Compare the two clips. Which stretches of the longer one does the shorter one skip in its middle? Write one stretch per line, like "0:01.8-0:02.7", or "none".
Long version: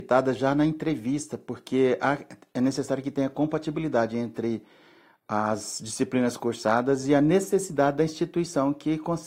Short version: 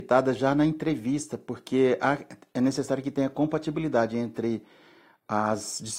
none